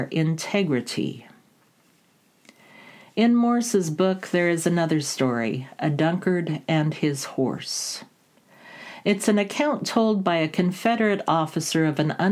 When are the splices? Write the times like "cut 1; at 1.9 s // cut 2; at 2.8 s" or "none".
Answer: none